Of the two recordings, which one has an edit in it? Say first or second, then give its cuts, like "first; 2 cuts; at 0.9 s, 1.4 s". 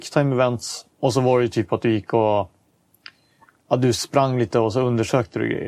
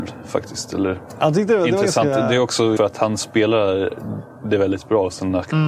second; 1 cut; at 2.8 s